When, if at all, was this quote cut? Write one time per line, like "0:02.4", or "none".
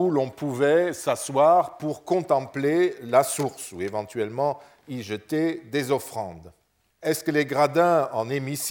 0:06.9